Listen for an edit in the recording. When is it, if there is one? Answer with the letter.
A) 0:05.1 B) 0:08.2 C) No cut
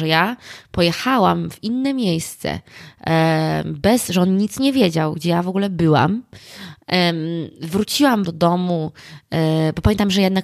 B